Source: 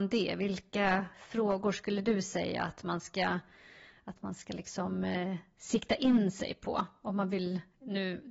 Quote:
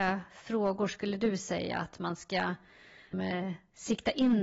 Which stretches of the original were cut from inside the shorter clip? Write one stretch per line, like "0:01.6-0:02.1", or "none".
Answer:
0:04.0-0:05.0